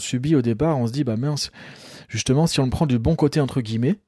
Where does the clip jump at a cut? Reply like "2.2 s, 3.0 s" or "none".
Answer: none